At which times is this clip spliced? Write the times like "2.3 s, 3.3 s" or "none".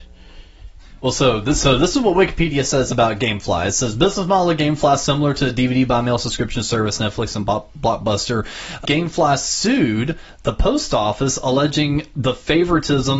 8.8 s